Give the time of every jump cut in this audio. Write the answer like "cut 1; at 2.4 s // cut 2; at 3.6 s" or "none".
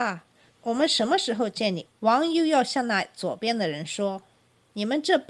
cut 1; at 1.9 s